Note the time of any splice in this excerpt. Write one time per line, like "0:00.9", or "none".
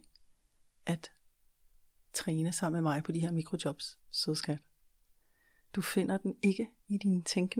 0:04.0